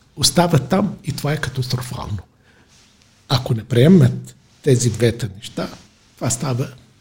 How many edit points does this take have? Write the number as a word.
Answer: zero